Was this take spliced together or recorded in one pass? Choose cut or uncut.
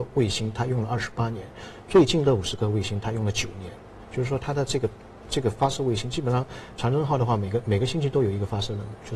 uncut